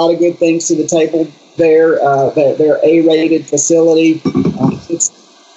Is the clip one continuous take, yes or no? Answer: yes